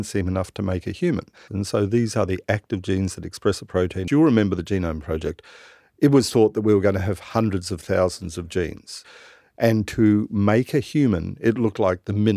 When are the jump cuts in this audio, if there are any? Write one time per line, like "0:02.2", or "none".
0:01.5
0:04.1